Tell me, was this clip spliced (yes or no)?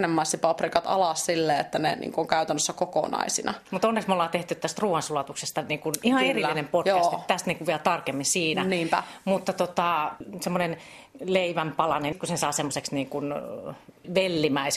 no